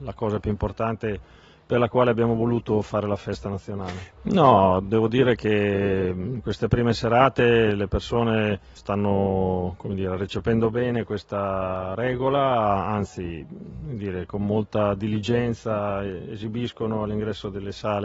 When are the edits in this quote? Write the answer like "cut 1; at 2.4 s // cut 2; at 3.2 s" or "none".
cut 1; at 4.1 s // cut 2; at 8.8 s